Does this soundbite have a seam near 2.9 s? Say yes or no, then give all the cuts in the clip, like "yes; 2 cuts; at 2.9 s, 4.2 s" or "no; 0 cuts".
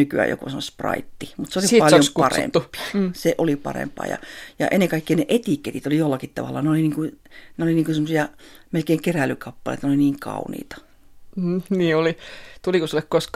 yes; 1 cut; at 2.9 s